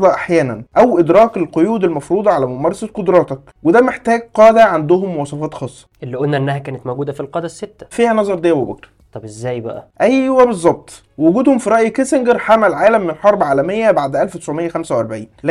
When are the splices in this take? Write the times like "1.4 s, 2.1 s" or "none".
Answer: 7.9 s, 9.9 s

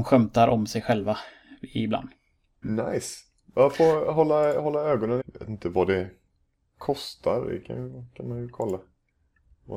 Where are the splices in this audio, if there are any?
2.6 s, 5.2 s

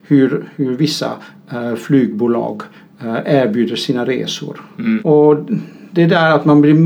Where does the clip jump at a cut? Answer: 5.0 s

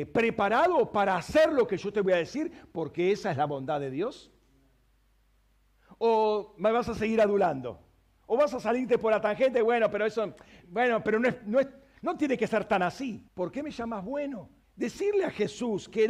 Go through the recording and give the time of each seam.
10.6 s, 13.3 s, 14.6 s

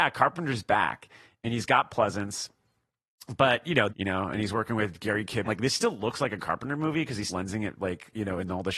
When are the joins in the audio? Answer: 3.9 s, 5.4 s, 7.3 s

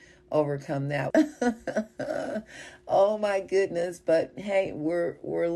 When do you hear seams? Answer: 1.1 s

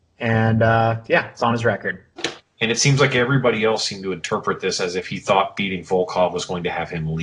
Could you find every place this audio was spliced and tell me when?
2.4 s

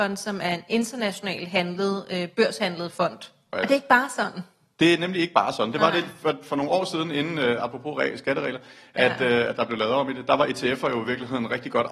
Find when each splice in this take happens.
3.5 s

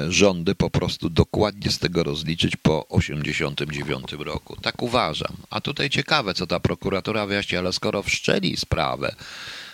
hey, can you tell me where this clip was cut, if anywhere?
none

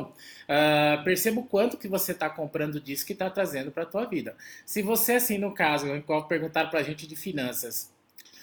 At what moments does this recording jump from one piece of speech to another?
none

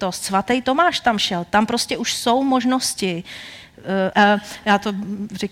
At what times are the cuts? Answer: 4.1 s

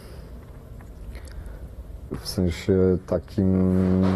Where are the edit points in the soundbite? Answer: 2.1 s

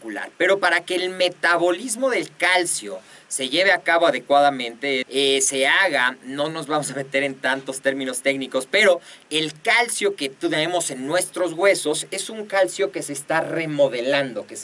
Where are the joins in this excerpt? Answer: 5.0 s

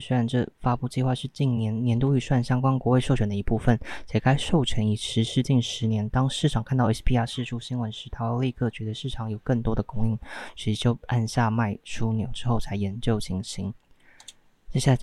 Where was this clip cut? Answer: none

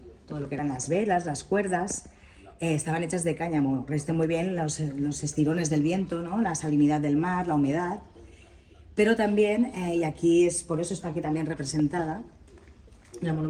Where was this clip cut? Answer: none

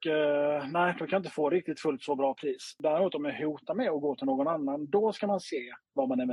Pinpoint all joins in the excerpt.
none

